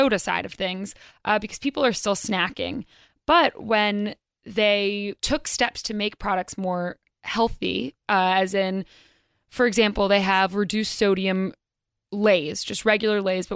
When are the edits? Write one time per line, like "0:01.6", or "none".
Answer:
0:05.2